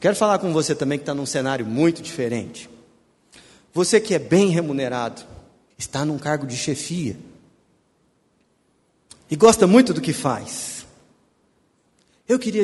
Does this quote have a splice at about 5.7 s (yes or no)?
yes